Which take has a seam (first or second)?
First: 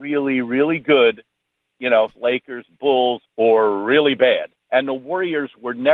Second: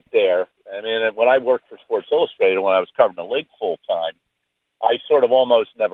first